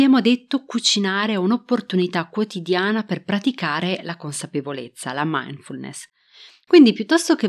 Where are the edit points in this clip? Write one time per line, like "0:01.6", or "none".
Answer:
none